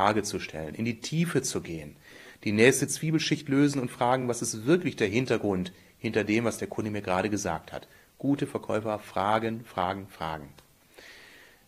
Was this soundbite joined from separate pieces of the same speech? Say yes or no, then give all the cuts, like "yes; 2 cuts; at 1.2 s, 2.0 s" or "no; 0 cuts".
no; 0 cuts